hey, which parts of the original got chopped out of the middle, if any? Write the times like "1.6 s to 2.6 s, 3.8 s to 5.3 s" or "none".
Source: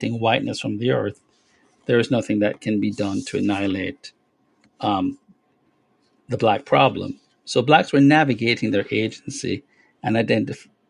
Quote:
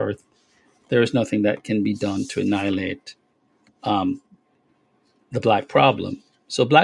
none